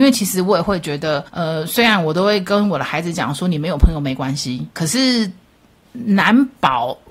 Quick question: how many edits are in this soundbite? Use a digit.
2